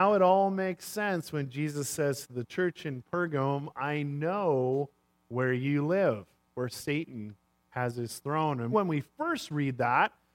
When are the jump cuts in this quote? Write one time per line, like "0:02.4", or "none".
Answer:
0:08.7